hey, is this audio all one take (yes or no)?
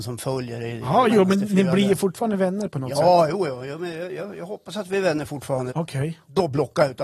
no